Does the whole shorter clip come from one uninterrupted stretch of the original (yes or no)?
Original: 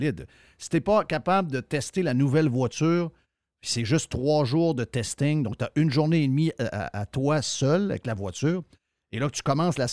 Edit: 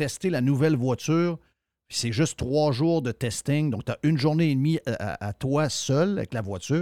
yes